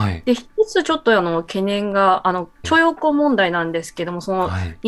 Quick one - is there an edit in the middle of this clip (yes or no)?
yes